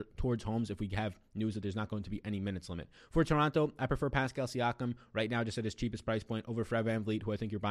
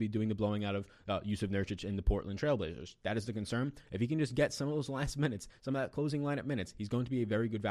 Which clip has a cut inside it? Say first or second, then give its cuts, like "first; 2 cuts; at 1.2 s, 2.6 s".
second; 1 cut; at 3.8 s